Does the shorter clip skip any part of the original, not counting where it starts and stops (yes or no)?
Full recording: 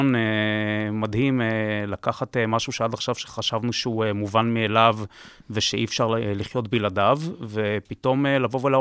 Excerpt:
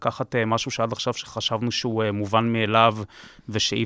no